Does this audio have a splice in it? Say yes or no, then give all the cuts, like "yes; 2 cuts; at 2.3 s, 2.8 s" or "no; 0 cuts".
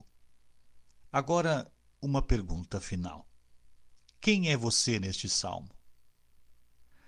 yes; 1 cut; at 1.0 s